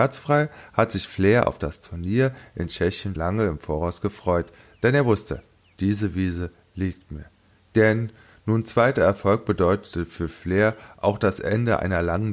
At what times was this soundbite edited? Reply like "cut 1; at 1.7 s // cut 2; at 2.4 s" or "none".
cut 1; at 3.2 s // cut 2; at 7.6 s

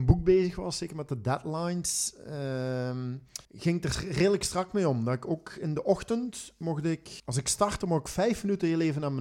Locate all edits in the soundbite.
cut 1; at 3.4 s // cut 2; at 7.2 s

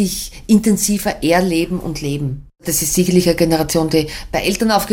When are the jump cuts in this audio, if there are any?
cut 1; at 2.6 s

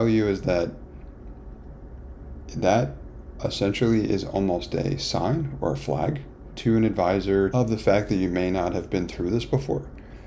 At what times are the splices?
cut 1; at 7.5 s

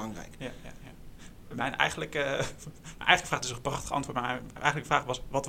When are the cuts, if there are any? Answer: none

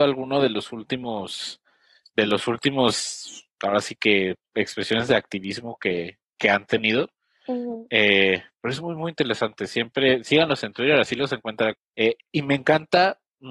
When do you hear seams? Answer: cut 1; at 11.7 s

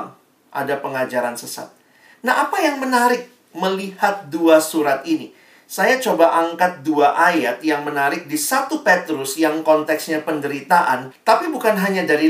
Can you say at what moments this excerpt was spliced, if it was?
cut 1; at 11.1 s

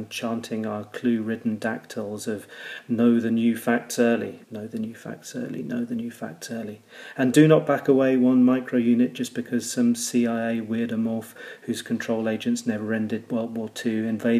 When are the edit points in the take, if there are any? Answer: cut 1; at 4.4 s

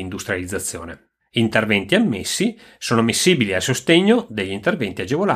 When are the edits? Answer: none

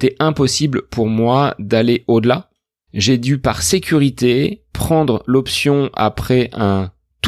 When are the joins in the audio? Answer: cut 1; at 2.9 s

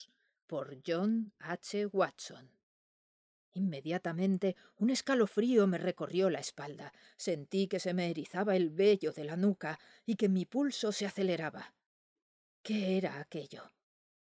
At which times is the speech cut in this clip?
none

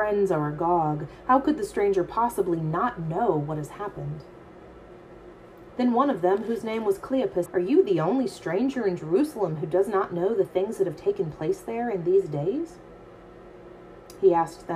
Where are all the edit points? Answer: cut 1; at 5.7 s // cut 2; at 7.5 s

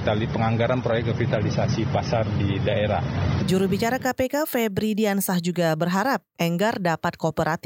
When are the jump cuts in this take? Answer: cut 1; at 3.4 s

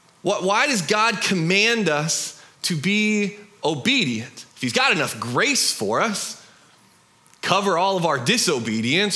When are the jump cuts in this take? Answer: cut 1; at 4.5 s

